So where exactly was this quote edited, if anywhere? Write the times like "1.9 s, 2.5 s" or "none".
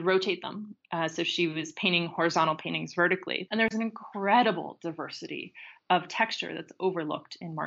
3.5 s